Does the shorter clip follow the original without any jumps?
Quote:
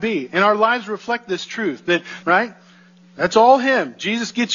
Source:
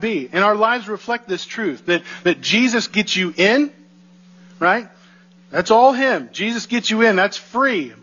no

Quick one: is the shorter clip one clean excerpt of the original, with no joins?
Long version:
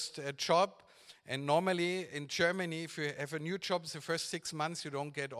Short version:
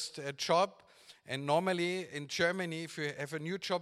yes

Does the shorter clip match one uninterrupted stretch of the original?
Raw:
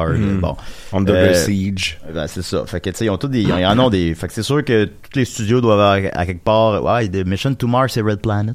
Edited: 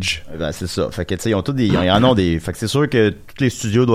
yes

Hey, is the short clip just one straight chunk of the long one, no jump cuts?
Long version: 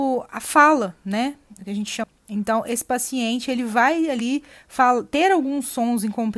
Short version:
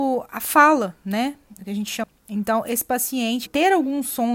no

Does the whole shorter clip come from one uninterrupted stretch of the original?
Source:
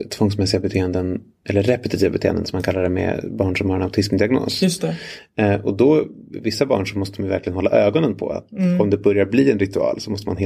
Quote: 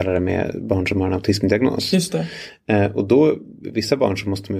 yes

